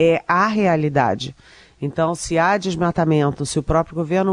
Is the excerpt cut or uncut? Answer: uncut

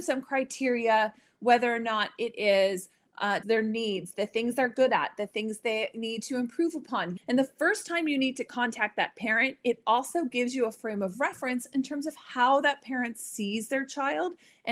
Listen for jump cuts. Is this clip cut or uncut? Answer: cut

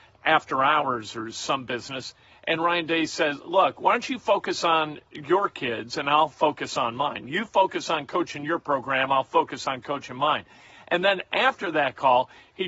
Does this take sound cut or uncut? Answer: uncut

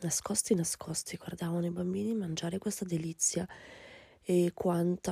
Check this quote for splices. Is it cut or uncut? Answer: uncut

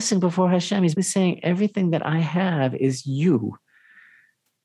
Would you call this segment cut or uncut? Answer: cut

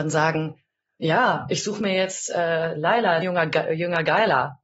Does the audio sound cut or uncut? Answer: cut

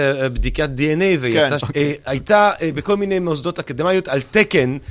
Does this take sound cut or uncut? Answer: cut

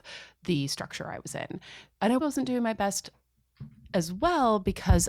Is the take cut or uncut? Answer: cut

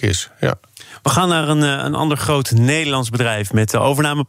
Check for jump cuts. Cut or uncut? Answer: uncut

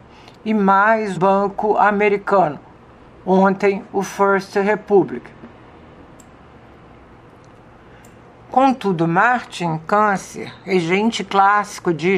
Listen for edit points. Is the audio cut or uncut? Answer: cut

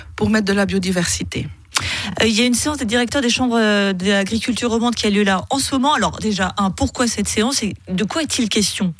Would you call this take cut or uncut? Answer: uncut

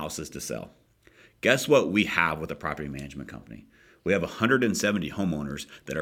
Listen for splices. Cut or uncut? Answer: uncut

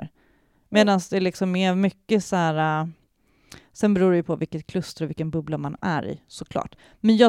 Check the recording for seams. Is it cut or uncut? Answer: uncut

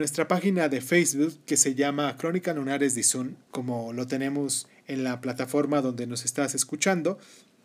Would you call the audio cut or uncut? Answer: cut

